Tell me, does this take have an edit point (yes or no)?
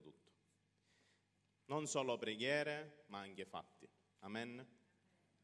yes